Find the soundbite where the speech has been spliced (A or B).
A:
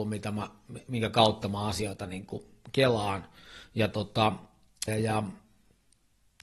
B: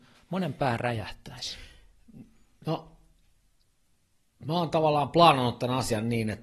A